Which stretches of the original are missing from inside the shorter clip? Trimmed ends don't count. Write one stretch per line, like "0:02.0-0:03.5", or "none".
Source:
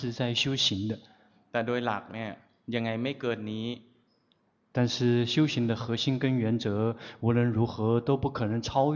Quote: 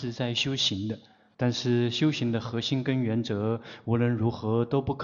0:01.3-0:04.7